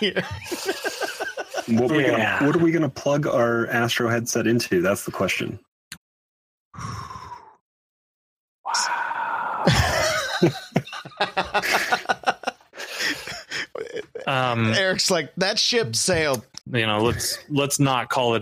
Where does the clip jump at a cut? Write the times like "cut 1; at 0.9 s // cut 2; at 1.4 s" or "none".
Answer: cut 1; at 1.9 s // cut 2; at 6.0 s // cut 3; at 16.6 s